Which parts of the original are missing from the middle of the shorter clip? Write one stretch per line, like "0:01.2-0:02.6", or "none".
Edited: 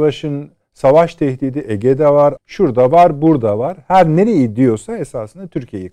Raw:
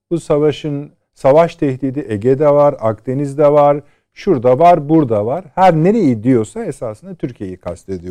0:02.8-0:04.0